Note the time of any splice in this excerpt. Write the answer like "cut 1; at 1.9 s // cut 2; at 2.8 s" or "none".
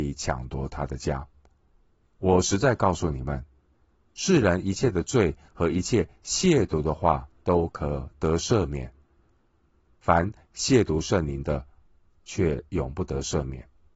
none